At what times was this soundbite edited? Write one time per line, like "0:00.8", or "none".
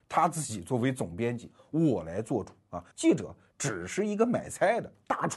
0:02.9